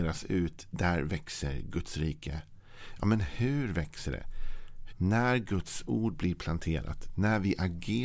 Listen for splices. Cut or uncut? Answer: cut